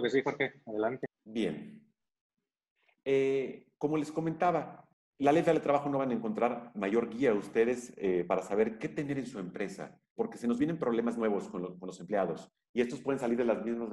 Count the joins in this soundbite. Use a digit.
1